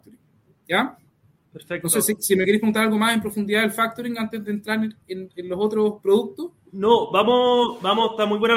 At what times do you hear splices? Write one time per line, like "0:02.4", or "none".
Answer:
none